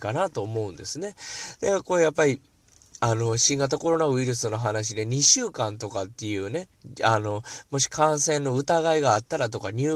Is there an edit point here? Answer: no; 0 cuts

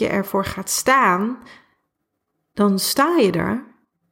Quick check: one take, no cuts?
yes; 0 cuts

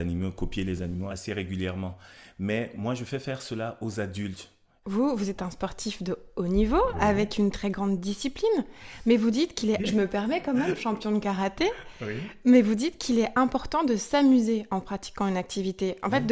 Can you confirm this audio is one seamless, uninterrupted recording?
no; 2 cuts; at 4.8 s, 9.8 s

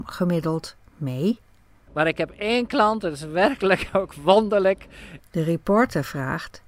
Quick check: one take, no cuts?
no; 2 cuts; at 1.9 s, 5.2 s

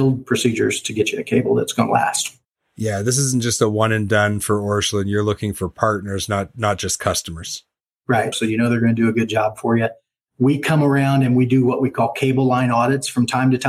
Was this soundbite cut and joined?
yes; 1 cut; at 8.3 s

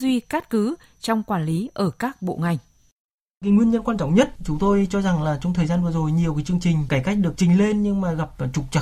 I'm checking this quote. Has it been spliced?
no; 0 cuts

